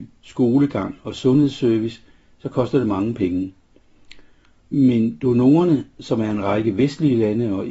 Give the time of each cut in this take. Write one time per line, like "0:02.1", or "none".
0:04.6